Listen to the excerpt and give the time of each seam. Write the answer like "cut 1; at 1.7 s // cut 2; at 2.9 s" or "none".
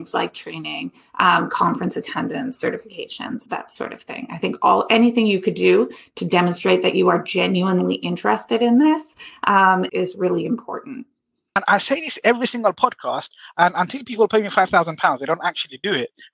cut 1; at 3.5 s // cut 2; at 9.9 s